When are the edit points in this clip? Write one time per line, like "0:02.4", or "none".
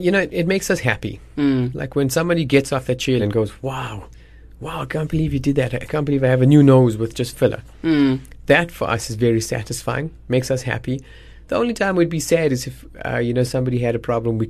0:03.2